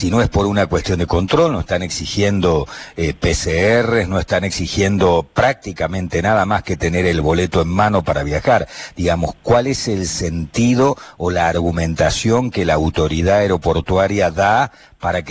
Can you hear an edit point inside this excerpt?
no; 0 cuts

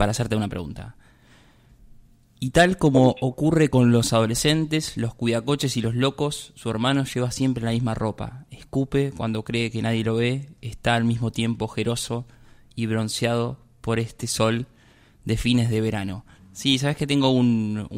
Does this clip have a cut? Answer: yes; 1 cut; at 16.4 s

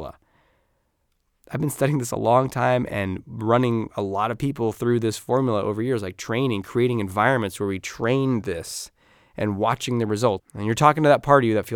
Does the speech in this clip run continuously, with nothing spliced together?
no; 1 cut; at 10.4 s

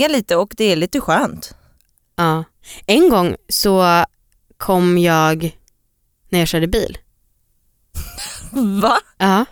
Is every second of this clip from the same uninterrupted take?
yes; 0 cuts

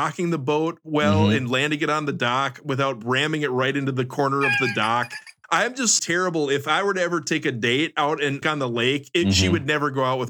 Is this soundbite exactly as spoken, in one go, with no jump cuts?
no; 2 cuts; at 6.0 s, 8.4 s

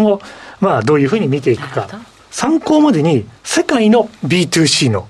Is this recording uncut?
no; 2 cuts; at 2.2 s, 3.4 s

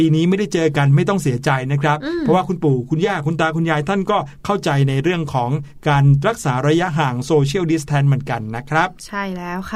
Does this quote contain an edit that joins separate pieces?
no; 0 cuts

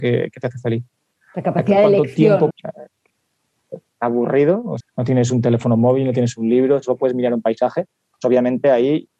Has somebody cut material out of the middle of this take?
yes; 2 cuts; at 2.5 s, 4.8 s

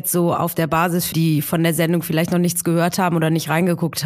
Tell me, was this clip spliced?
yes; 1 cut; at 1.1 s

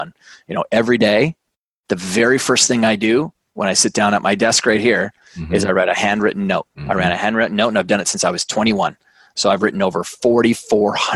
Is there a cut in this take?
yes; 1 cut; at 6.7 s

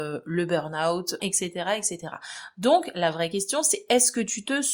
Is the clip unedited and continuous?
no; 1 cut; at 1.2 s

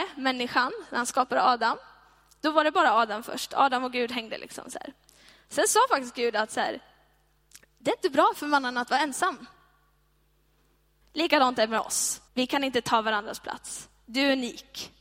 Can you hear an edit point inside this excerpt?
yes; 2 cuts; at 11.0 s, 12.3 s

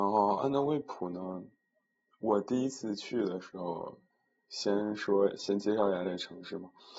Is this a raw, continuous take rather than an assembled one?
yes; 0 cuts

